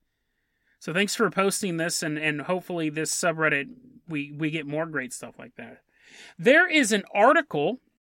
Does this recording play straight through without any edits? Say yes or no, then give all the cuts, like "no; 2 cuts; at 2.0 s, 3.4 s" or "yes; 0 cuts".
yes; 0 cuts